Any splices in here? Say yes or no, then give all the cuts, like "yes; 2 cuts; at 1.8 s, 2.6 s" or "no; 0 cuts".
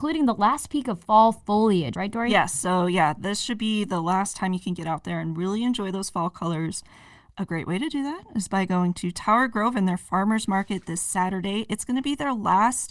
yes; 1 cut; at 1.9 s